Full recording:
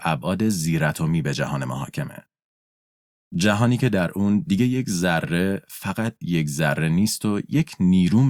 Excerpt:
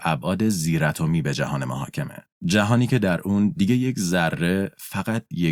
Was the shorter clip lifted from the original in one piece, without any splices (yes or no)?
no